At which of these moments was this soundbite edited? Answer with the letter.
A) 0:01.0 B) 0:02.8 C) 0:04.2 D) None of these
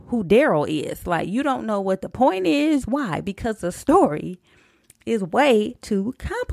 B